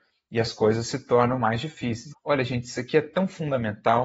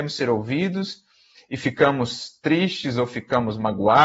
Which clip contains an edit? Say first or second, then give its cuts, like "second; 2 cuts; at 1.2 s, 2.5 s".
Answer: first; 1 cut; at 2.1 s